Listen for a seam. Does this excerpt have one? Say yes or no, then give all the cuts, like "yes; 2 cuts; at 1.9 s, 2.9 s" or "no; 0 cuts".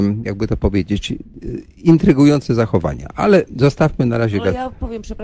no; 0 cuts